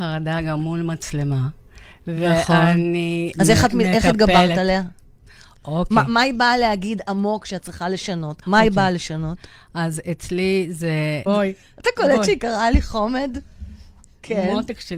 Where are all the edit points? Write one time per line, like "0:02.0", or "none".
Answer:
0:03.3
0:08.4
0:11.3